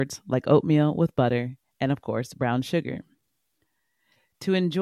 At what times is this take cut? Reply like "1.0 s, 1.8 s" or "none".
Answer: none